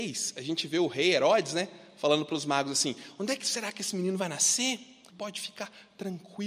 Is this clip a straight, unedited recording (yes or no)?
no